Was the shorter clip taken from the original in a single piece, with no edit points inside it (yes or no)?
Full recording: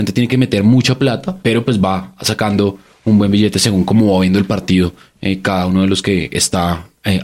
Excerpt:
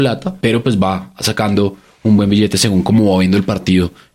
yes